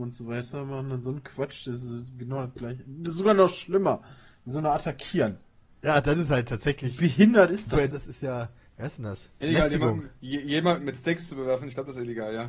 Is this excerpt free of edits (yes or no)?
no